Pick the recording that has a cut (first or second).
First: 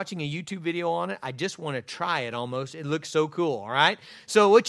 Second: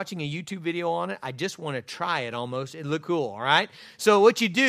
second